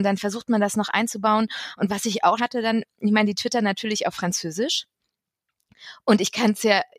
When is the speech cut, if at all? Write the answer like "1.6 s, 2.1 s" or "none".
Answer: 2.4 s